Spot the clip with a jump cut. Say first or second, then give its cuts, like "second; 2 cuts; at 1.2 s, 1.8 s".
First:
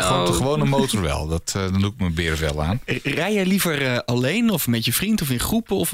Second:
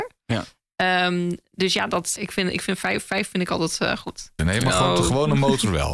second; 2 cuts; at 2.2 s, 4.4 s